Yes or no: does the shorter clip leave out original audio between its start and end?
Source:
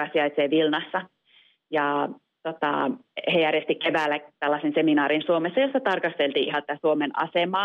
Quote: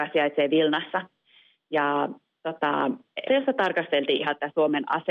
yes